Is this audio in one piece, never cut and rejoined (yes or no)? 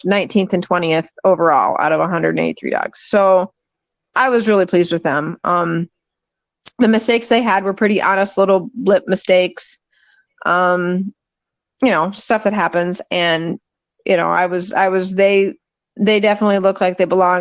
yes